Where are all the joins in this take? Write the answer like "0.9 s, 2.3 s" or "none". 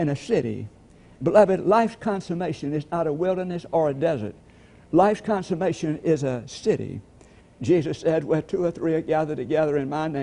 7.4 s